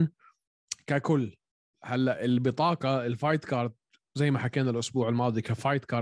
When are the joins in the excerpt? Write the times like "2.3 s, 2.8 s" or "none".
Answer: none